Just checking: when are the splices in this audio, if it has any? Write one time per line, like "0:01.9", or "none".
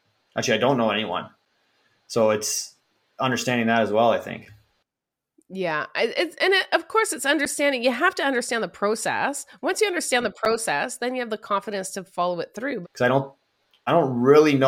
0:12.8